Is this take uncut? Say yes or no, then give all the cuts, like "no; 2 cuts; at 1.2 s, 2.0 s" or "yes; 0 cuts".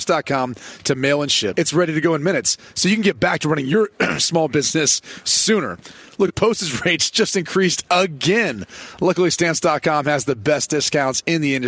no; 1 cut; at 1.5 s